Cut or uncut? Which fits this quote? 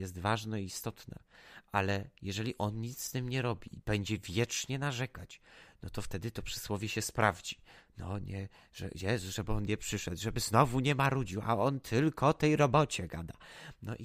uncut